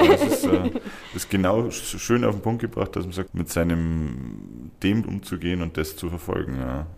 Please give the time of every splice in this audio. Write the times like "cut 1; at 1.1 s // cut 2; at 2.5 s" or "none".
cut 1; at 3.3 s // cut 2; at 5.0 s